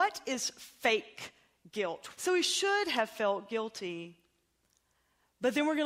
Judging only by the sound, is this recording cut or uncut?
cut